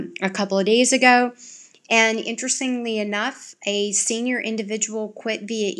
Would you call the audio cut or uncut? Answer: uncut